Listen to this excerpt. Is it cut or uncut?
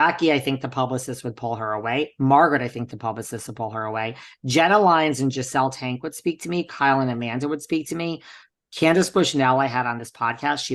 uncut